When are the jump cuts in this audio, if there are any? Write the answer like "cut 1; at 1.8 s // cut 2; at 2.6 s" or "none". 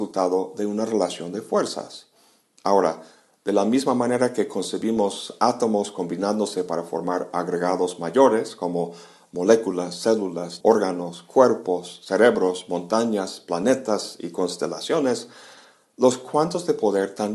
cut 1; at 10.6 s